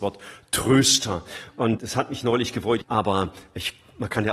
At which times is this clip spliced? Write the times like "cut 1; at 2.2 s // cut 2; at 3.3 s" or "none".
cut 1; at 1.8 s // cut 2; at 2.8 s